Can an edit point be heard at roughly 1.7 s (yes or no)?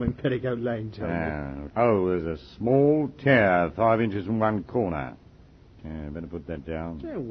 yes